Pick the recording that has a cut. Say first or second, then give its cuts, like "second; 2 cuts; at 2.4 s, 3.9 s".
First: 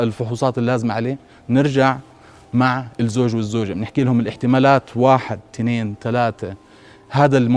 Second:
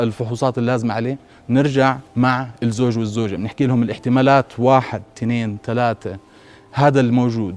second; 1 cut; at 2.1 s